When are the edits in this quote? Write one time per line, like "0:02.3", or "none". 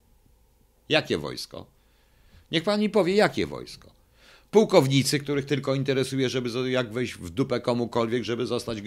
none